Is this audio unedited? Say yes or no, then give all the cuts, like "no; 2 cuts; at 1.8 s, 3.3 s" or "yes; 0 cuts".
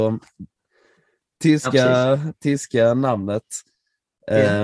yes; 0 cuts